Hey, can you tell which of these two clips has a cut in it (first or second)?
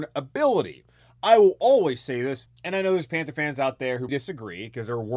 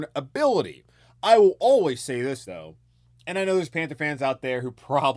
first